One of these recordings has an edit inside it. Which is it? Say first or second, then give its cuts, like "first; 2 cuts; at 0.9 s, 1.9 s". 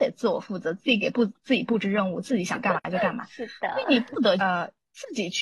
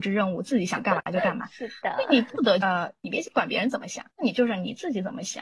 second; 2 cuts; at 3.0 s, 4.1 s